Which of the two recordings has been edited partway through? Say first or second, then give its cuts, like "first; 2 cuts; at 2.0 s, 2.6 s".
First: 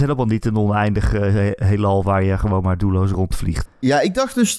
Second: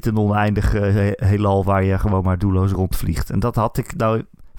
first; 1 cut; at 3.7 s